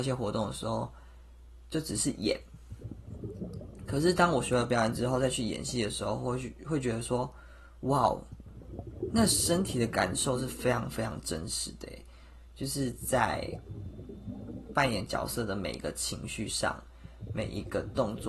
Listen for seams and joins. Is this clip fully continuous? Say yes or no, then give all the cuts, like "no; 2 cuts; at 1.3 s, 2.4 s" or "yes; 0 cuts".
yes; 0 cuts